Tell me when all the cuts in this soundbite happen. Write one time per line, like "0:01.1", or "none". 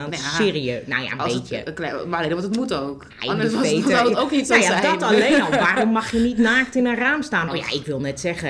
0:07.5